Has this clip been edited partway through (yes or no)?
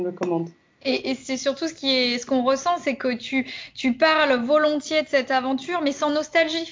no